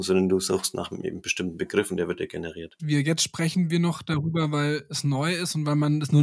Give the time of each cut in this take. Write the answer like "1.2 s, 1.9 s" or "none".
2.8 s